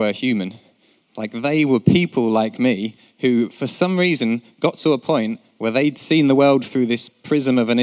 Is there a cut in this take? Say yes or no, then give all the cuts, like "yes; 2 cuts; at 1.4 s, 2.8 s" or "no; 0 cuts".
no; 0 cuts